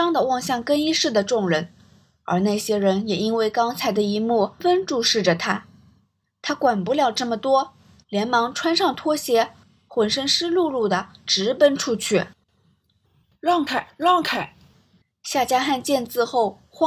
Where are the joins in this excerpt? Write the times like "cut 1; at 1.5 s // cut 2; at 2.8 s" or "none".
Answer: cut 1; at 4.6 s // cut 2; at 15.0 s